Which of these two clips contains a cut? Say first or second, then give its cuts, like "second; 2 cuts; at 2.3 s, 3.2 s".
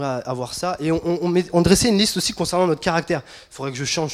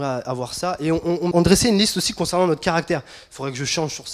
second; 1 cut; at 1.3 s